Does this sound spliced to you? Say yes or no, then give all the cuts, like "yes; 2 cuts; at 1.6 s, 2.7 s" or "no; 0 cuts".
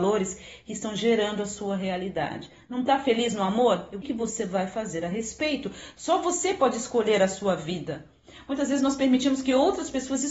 yes; 1 cut; at 4.0 s